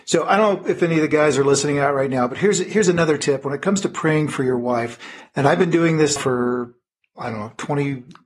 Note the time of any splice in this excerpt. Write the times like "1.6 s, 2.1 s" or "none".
6.2 s